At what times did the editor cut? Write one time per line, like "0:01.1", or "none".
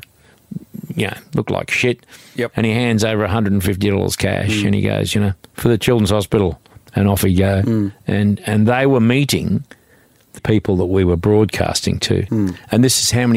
0:10.4
0:12.3